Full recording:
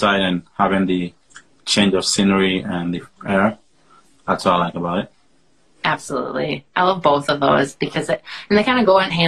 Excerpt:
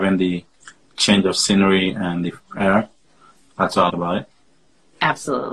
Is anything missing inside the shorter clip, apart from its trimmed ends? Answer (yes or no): yes